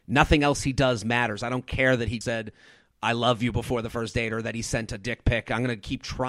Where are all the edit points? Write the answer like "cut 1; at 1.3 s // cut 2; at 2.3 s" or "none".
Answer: cut 1; at 2.2 s

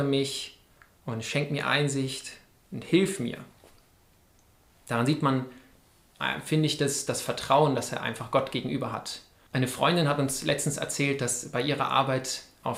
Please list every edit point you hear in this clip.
cut 1; at 9.5 s

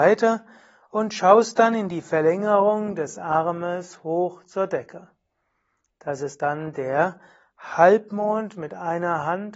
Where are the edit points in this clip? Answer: none

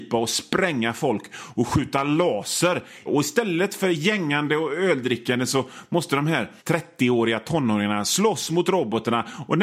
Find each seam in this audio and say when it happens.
cut 1; at 3.1 s // cut 2; at 6.6 s

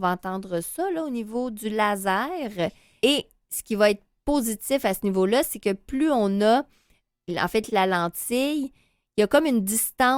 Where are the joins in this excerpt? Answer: cut 1; at 3.0 s // cut 2; at 7.7 s

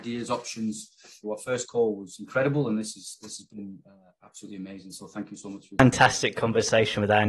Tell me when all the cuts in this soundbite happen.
cut 1; at 1.2 s

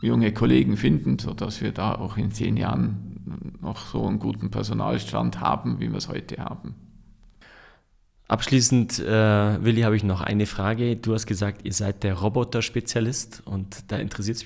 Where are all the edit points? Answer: cut 1; at 1.2 s

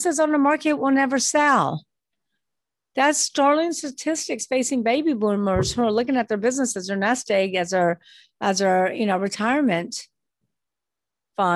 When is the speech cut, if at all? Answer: none

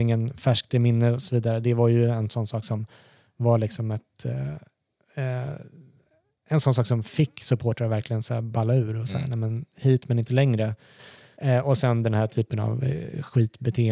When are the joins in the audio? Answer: cut 1; at 11.3 s

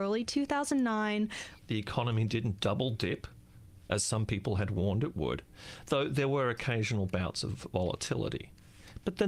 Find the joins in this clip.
cut 1; at 1.6 s

